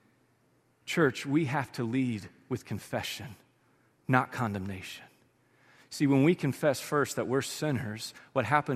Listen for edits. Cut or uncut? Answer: uncut